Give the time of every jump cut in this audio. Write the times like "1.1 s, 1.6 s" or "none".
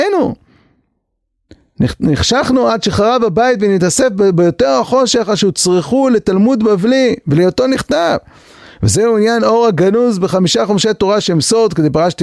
none